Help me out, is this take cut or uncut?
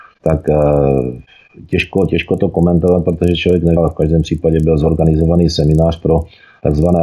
cut